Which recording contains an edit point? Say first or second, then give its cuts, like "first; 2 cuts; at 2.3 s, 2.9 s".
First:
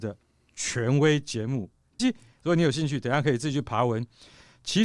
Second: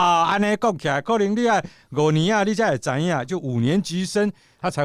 first; 1 cut; at 2.0 s